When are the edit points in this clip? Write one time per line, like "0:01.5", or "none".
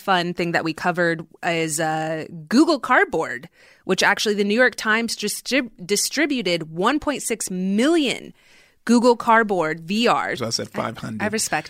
0:10.4